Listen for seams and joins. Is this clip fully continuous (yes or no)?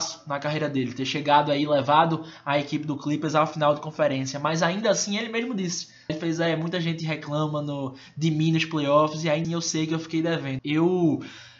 no